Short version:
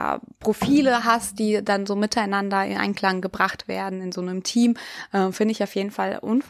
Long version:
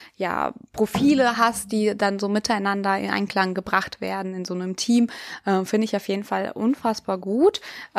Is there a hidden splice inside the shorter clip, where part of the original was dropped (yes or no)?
no